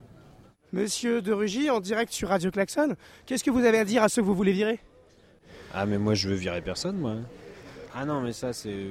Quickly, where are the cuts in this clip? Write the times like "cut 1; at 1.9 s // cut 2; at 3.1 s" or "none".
cut 1; at 7.9 s